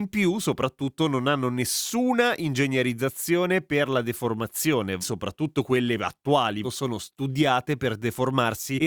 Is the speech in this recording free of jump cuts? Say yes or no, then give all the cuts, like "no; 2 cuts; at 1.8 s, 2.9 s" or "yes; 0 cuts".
no; 2 cuts; at 5.0 s, 6.6 s